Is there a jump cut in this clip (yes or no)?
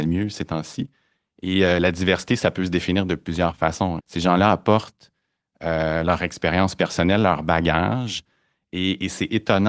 yes